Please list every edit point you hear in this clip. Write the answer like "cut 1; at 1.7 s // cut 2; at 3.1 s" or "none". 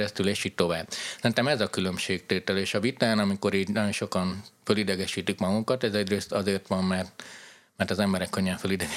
none